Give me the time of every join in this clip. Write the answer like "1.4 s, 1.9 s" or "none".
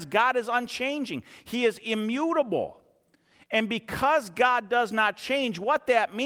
none